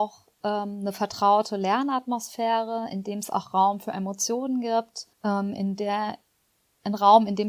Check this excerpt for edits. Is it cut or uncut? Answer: cut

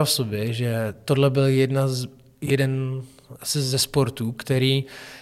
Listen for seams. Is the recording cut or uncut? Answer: uncut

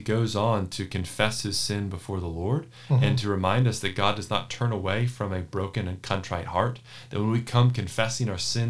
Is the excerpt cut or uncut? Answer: uncut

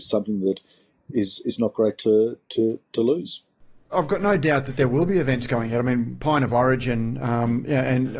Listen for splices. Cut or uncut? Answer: uncut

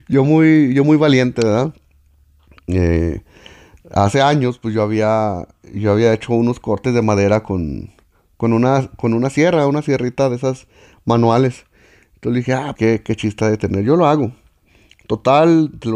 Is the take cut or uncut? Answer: cut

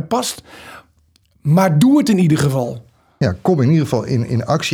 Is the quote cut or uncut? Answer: uncut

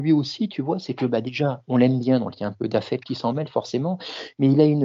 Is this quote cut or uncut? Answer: uncut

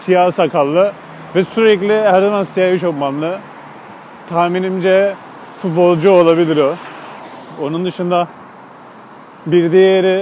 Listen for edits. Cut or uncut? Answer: uncut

